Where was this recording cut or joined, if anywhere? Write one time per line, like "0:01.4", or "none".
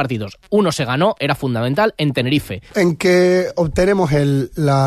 0:02.7

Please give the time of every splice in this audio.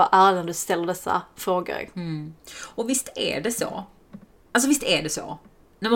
none

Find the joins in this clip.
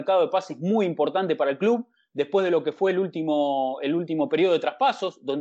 none

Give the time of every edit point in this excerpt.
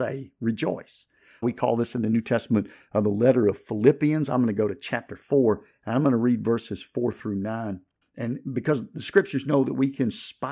0:01.4
0:08.0

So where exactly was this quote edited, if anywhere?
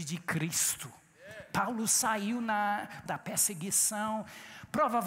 0:03.1

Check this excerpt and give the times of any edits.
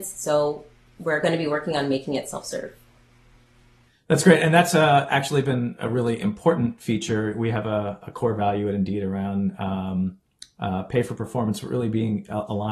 none

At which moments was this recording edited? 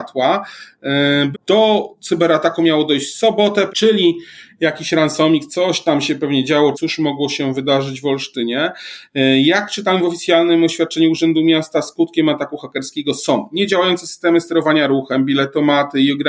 0:01.3
0:03.7
0:06.7

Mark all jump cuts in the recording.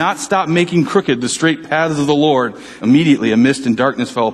0:02.8

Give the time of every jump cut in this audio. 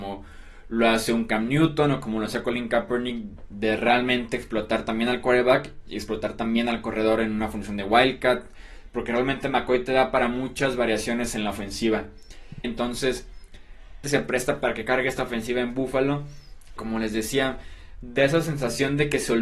0:12.6
0:14.0
0:16.8

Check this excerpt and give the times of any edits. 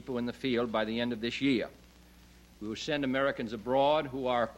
none

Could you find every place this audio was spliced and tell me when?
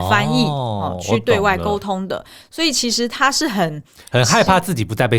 none

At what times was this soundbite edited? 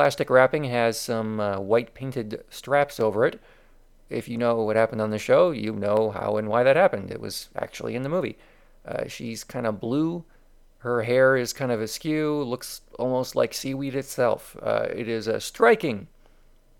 none

